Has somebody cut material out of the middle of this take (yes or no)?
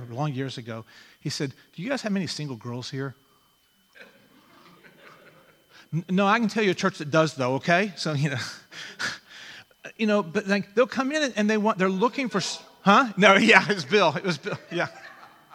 no